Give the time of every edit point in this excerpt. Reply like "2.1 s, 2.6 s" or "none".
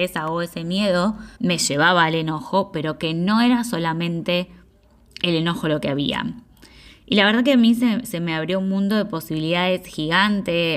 1.3 s